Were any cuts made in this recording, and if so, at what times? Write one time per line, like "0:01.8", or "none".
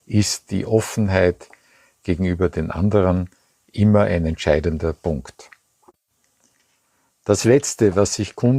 none